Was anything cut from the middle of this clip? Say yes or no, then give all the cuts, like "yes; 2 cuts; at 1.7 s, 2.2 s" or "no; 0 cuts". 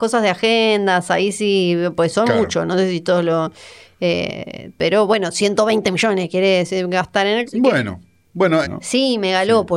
yes; 2 cuts; at 7.5 s, 8.6 s